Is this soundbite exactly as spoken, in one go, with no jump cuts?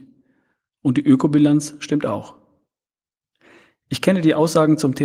yes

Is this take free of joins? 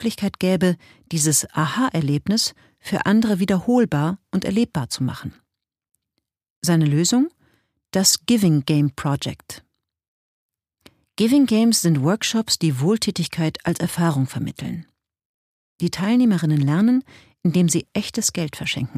yes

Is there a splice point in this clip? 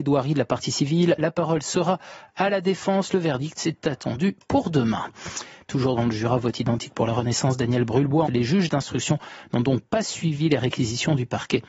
yes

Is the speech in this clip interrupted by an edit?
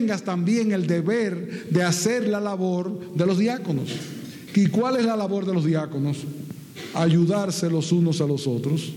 no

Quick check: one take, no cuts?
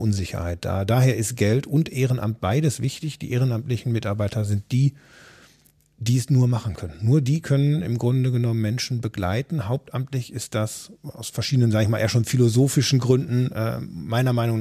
yes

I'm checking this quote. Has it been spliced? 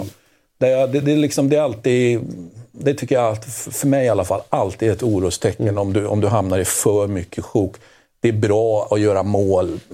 no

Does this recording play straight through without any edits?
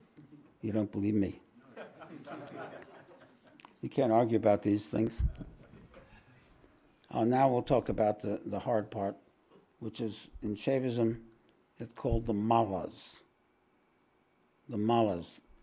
yes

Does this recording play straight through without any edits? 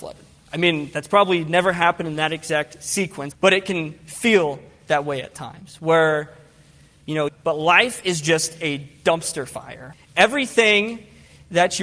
no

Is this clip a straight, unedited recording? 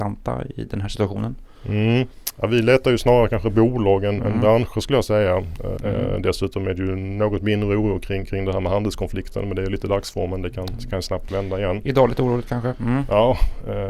no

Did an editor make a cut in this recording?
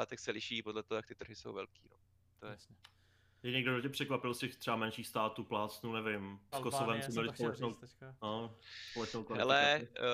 yes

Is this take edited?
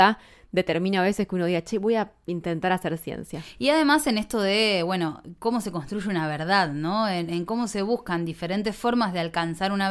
no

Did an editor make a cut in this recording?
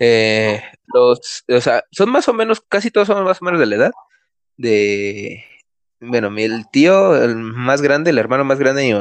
no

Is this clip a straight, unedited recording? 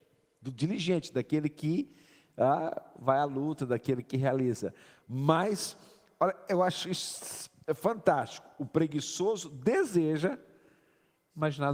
yes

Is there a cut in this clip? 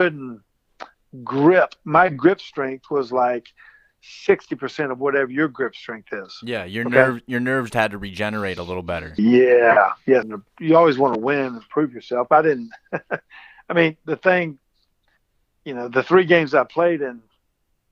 yes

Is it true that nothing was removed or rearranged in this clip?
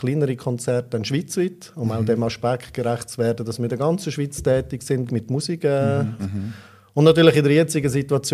no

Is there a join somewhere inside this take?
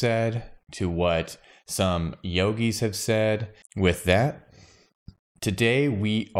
yes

